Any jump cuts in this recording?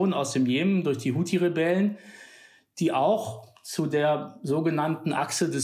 no; 0 cuts

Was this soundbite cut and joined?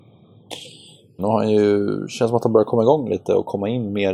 yes; 1 cut; at 1.2 s

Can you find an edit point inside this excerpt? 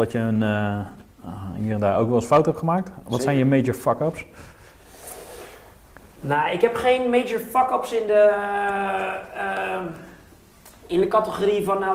no; 0 cuts

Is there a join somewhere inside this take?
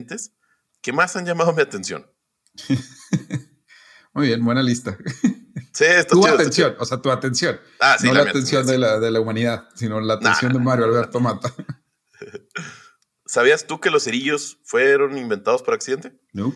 no; 0 cuts

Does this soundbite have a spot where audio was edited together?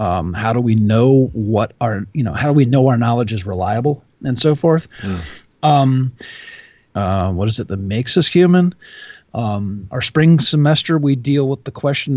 yes; 1 cut; at 6.9 s

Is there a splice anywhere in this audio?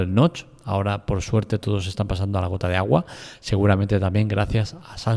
no; 0 cuts

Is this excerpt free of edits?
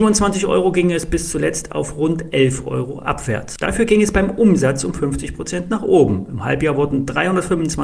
no; 1 cut; at 3.6 s

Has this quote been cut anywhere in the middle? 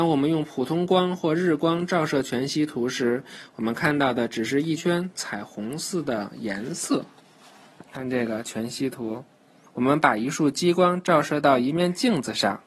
yes; 2 cuts; at 4.8 s, 9.7 s

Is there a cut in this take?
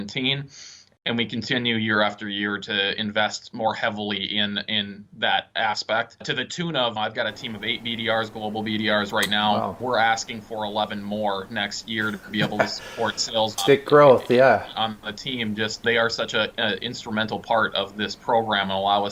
yes; 2 cuts; at 14.7 s, 16.5 s

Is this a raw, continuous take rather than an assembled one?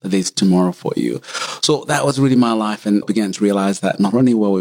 no; 1 cut; at 3.0 s

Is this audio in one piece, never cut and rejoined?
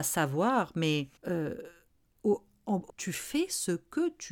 no; 2 cuts; at 1.2 s, 2.9 s

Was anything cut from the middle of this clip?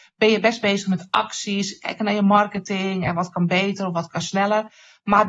no; 0 cuts

